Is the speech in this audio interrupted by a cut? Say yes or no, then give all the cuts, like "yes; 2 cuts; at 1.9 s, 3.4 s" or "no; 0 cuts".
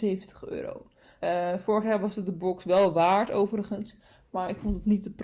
yes; 1 cut; at 1.2 s